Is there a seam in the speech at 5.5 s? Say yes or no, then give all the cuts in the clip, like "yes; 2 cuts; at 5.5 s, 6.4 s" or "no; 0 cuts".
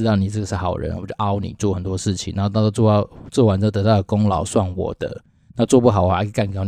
no; 0 cuts